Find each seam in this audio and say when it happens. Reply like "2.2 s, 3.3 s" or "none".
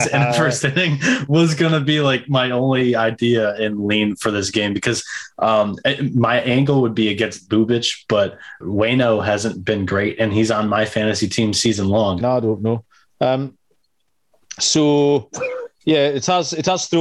8.6 s, 12.2 s